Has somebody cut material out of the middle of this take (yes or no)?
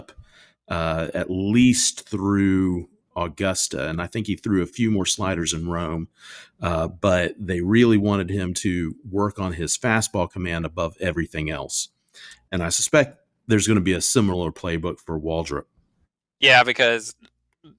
no